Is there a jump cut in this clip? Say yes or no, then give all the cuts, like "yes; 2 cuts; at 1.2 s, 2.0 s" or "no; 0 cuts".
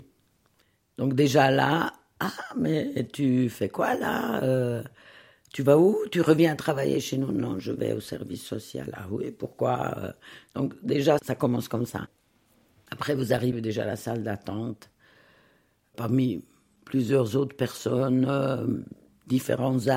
yes; 1 cut; at 11.2 s